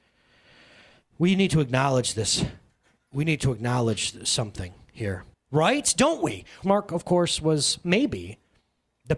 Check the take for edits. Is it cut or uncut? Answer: cut